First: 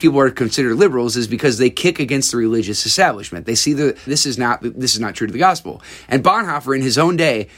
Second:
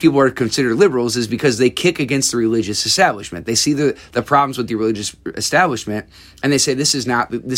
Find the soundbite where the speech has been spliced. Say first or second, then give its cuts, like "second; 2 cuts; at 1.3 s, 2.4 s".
first; 1 cut; at 4.1 s